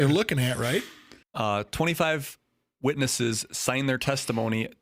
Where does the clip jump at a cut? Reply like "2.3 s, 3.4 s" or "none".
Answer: 1.2 s